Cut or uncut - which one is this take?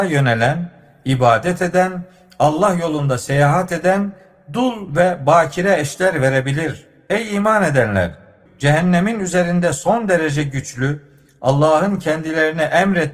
cut